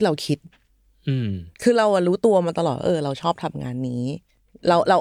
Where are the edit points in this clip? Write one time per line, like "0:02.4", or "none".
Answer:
0:01.5